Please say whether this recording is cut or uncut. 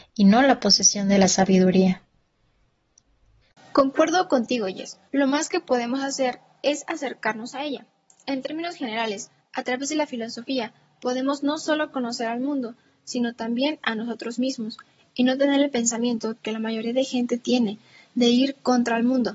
cut